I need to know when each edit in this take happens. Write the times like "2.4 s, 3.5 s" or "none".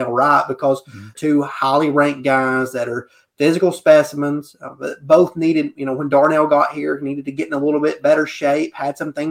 1.1 s